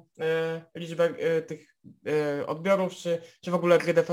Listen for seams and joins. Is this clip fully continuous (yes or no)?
yes